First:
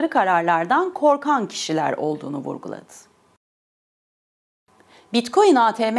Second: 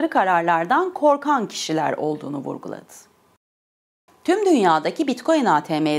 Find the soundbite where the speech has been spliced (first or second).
second